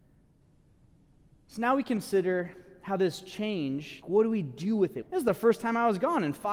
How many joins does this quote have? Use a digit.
2